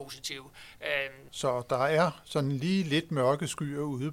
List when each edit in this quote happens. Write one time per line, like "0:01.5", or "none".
0:01.3